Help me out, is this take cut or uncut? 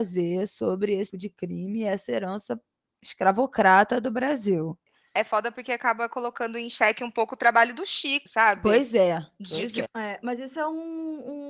cut